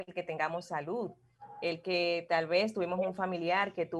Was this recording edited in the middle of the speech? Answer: no; 0 cuts

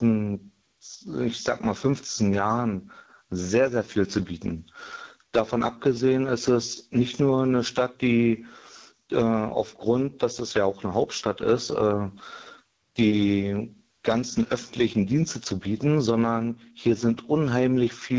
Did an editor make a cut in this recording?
no; 0 cuts

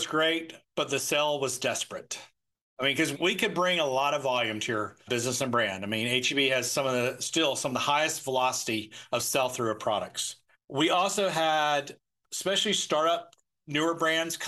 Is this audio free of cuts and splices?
yes; 0 cuts

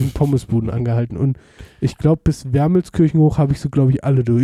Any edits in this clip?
no; 0 cuts

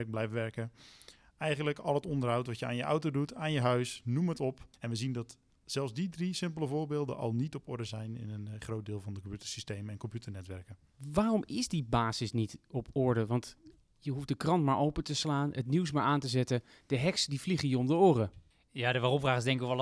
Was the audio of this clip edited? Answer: yes; 1 cut; at 4.7 s

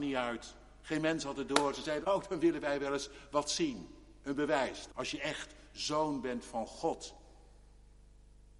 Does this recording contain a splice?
yes; 2 cuts; at 2.0 s, 4.9 s

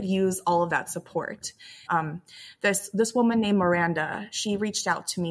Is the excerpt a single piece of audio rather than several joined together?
no; 1 cut; at 1.9 s

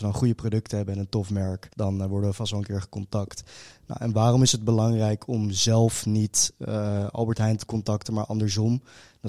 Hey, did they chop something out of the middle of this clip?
yes; 1 cut; at 1.7 s

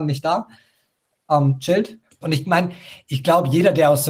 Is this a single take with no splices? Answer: no; 1 cut; at 2.2 s

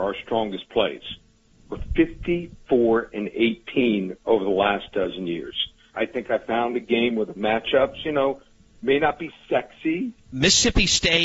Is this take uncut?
no; 2 cuts; at 5.9 s, 10.2 s

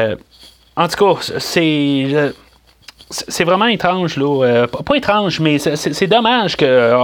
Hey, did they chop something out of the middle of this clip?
no; 0 cuts

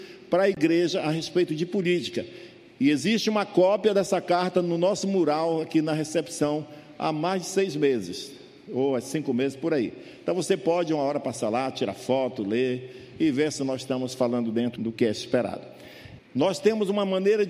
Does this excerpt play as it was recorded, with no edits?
no; 2 cuts; at 14.8 s, 16.2 s

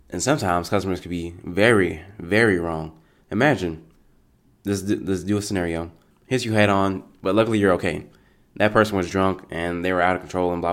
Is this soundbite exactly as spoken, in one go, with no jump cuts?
no; 1 cut; at 6.1 s

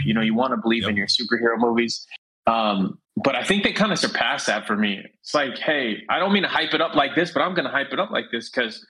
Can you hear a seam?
yes; 1 cut; at 3.0 s

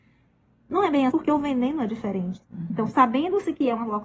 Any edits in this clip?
yes; 2 cuts; at 1.1 s, 2.4 s

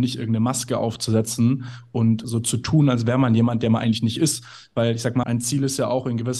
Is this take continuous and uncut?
no; 2 cuts; at 2.2 s, 5.2 s

